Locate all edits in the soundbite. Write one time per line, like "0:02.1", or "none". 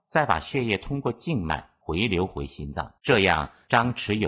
0:03.0